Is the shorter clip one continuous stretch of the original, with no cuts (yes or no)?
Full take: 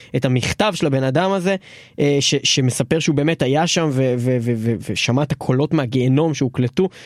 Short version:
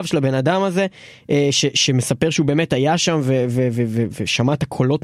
yes